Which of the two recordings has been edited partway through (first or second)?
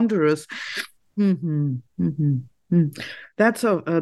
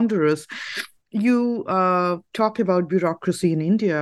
first